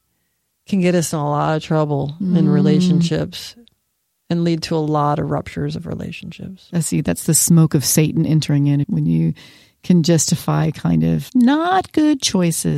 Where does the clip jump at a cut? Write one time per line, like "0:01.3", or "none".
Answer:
0:06.7
0:08.8
0:11.3